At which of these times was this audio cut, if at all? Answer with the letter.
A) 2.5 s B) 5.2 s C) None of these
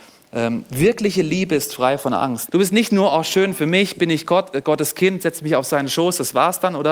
A